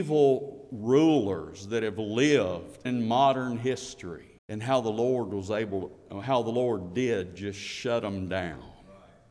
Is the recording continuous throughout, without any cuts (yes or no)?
no